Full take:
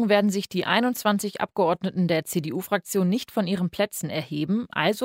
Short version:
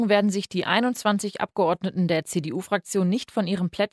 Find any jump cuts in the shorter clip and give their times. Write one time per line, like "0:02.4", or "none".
none